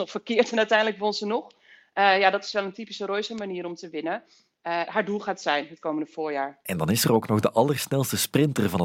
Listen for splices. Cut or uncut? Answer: cut